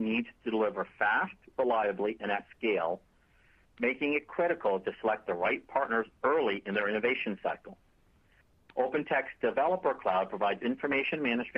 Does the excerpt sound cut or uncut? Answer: uncut